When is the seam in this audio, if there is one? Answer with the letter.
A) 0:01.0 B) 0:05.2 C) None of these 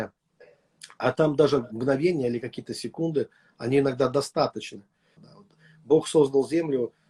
B